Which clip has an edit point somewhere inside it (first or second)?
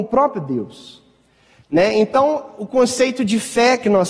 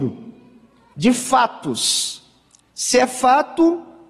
second